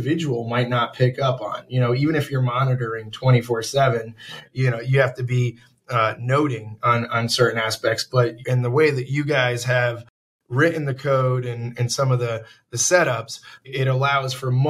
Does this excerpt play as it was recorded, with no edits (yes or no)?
yes